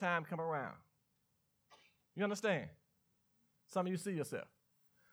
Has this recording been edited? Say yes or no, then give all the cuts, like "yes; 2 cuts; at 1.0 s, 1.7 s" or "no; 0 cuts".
no; 0 cuts